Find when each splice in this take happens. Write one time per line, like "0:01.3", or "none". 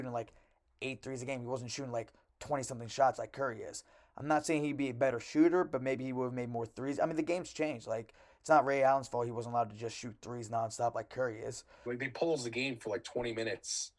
0:11.9